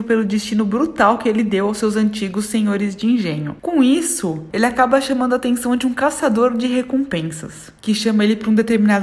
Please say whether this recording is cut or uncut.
uncut